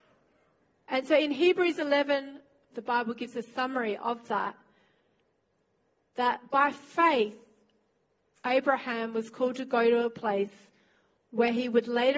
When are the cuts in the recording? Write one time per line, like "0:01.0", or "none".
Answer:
0:02.7